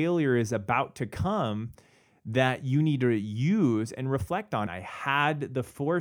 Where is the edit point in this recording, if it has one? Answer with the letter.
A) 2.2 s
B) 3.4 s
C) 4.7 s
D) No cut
C